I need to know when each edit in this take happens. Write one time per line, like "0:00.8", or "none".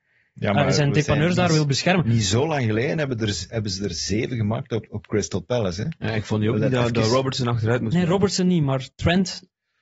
none

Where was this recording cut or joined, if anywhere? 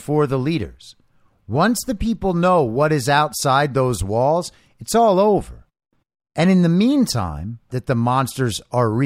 0:07.7

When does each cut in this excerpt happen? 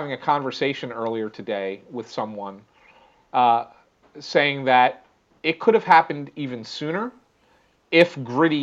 none

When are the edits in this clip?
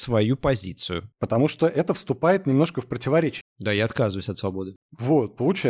0:01.1
0:03.4

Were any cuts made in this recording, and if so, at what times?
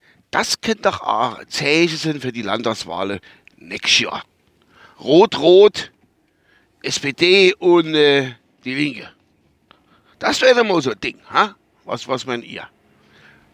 0:04.9

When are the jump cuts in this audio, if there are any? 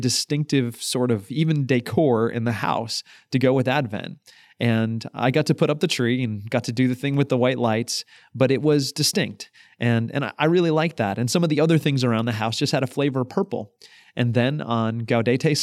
none

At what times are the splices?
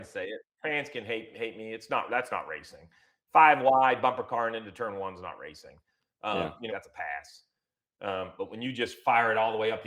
0:06.7

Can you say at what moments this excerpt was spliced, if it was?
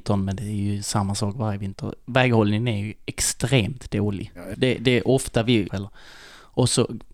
0:04.5
0:05.7

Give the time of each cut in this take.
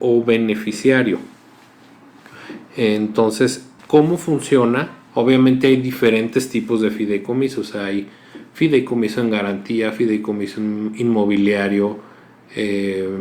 0:03.8
0:05.1

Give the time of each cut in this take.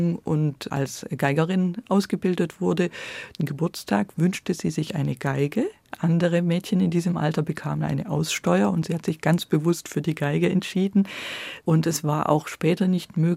0:03.4
0:11.6

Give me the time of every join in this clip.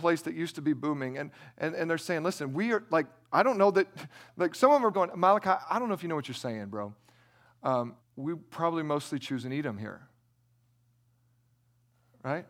0:04.9
0:08.0

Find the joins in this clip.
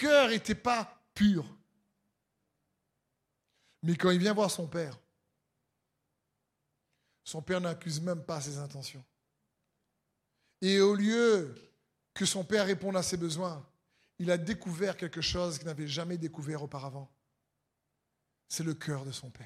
none

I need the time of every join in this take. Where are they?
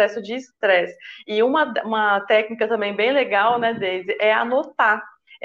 none

